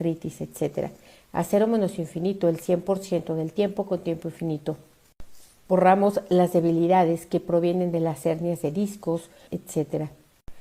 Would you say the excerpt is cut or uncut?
cut